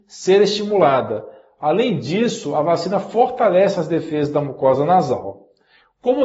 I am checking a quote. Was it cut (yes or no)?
no